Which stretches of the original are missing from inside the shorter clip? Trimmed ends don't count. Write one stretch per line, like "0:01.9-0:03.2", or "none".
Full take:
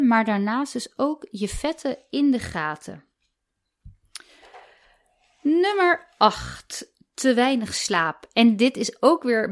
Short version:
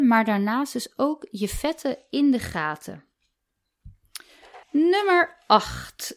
0:04.6-0:05.3